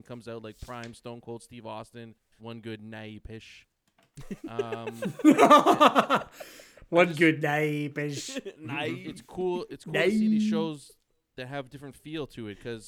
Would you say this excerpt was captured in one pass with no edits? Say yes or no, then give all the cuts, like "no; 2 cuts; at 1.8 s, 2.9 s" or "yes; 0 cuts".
no; 1 cut; at 2.4 s